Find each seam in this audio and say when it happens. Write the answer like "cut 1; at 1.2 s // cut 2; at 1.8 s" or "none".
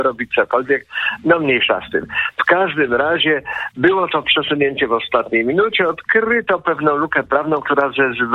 none